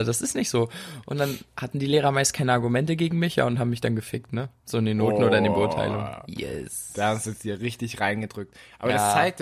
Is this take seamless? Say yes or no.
yes